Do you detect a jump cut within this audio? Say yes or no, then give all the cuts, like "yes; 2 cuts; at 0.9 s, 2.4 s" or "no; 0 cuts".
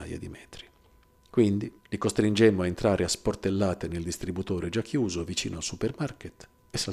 yes; 1 cut; at 1.8 s